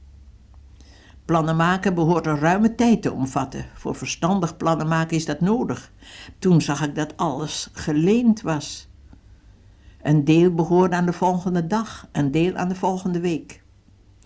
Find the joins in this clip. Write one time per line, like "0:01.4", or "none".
0:06.3